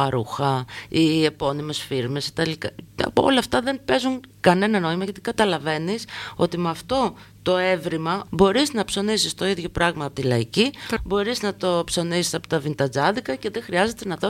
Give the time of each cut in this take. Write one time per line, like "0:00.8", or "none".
0:08.3
0:11.0